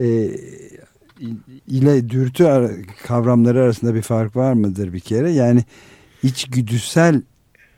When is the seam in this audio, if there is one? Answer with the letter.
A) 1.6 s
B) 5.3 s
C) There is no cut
A